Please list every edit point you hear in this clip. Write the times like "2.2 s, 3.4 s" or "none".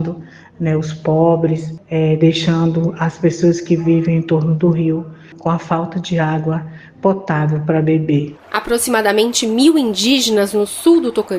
none